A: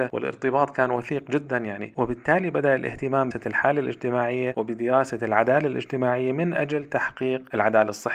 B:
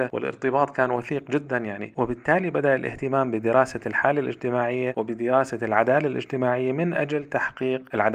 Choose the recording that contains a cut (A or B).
A